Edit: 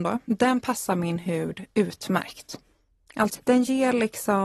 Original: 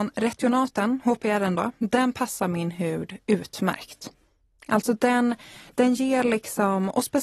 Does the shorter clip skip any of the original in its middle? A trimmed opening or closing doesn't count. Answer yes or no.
yes